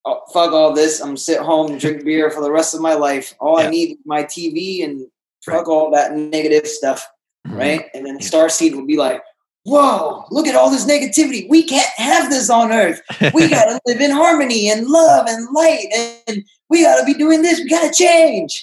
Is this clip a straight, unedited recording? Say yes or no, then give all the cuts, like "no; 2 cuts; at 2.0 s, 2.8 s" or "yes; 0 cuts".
yes; 0 cuts